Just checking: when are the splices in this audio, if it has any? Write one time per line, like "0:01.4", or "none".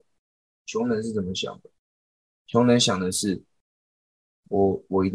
none